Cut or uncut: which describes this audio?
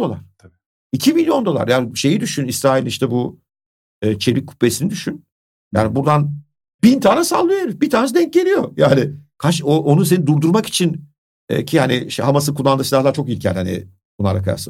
uncut